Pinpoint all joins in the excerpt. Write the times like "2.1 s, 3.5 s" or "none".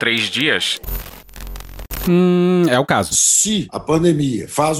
2.0 s, 3.1 s